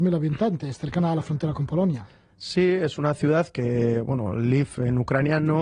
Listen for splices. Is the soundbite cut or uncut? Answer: uncut